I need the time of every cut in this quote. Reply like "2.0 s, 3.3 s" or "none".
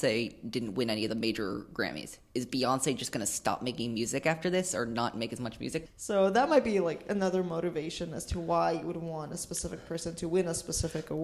5.9 s